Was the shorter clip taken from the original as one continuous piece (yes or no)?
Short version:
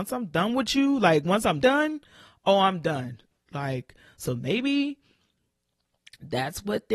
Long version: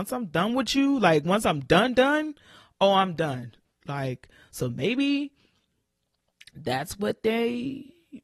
no